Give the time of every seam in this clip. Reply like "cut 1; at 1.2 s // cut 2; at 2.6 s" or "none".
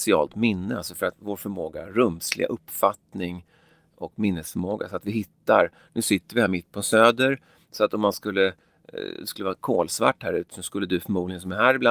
none